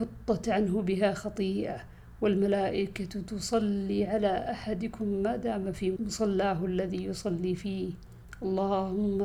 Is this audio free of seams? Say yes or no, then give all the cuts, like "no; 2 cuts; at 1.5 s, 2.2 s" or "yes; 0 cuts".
no; 1 cut; at 6.0 s